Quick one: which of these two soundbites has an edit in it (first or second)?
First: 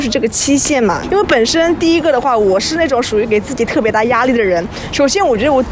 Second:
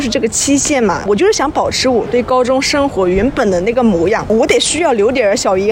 first